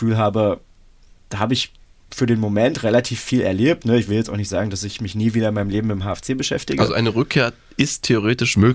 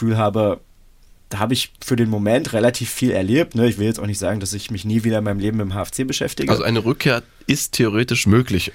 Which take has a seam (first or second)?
second